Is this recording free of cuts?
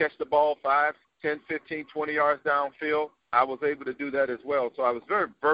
no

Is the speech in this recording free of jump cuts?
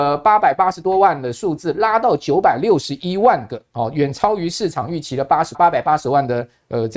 no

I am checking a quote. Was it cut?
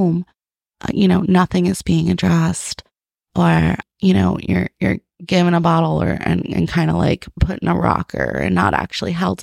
no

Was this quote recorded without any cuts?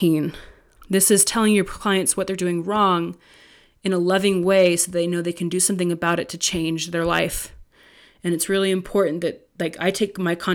yes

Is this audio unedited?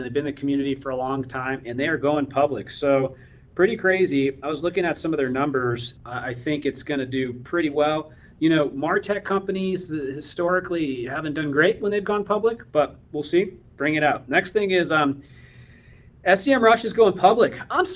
no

